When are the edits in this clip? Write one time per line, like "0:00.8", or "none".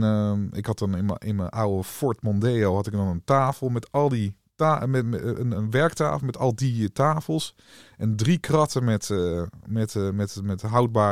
none